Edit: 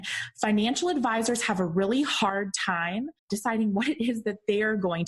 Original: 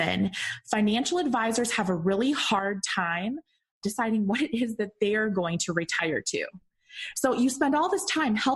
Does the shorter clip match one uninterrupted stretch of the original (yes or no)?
no